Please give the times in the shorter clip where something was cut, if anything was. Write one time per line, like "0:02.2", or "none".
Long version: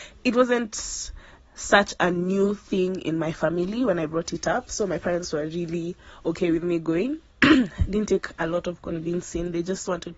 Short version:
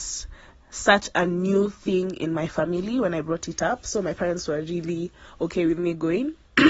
none